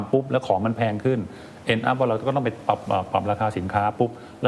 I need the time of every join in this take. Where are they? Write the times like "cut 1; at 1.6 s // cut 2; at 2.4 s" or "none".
none